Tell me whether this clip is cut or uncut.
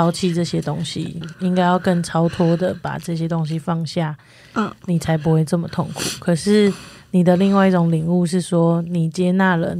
cut